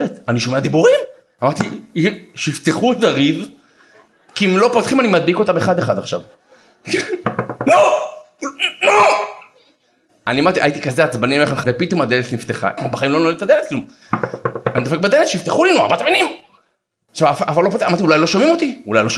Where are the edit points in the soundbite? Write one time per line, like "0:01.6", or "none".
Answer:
0:11.6
0:12.8